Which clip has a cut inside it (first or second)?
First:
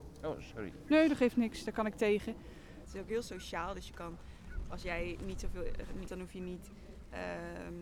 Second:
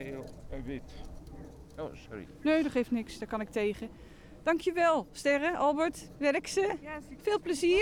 first